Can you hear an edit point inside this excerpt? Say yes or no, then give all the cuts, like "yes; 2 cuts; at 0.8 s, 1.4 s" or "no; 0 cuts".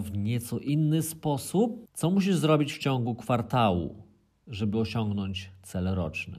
yes; 1 cut; at 1.9 s